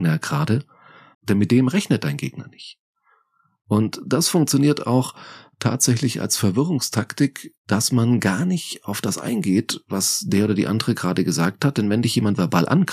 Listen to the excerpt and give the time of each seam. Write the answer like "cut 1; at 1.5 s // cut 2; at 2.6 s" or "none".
cut 1; at 1.1 s